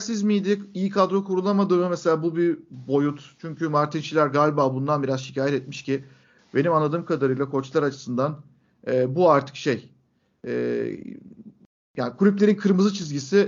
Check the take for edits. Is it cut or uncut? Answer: uncut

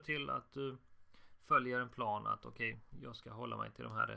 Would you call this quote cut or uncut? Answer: uncut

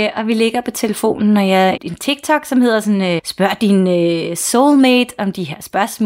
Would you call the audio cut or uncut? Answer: cut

